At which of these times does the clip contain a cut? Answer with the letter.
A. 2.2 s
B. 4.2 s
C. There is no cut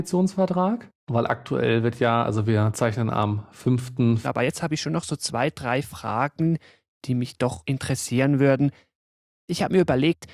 B